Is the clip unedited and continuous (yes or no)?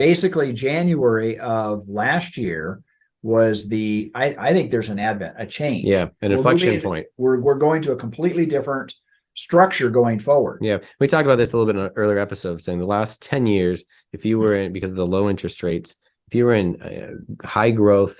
yes